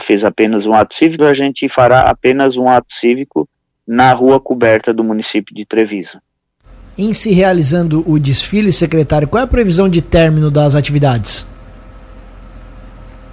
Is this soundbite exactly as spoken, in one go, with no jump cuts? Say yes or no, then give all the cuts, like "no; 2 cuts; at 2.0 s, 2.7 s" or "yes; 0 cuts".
no; 1 cut; at 1.2 s